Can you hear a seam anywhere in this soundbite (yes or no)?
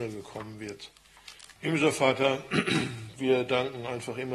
yes